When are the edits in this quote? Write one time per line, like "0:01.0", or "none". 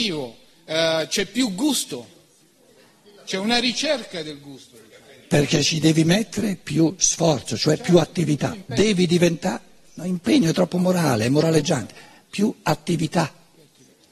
none